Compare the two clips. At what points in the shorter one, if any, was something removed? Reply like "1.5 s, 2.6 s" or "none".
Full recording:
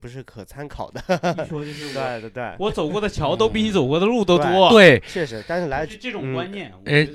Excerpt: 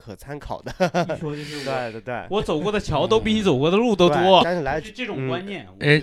4.4 s